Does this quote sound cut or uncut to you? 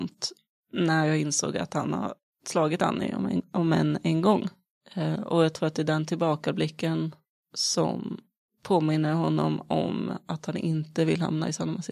uncut